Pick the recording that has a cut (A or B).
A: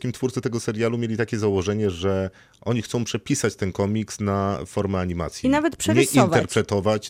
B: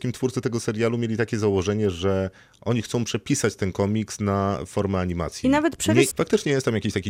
B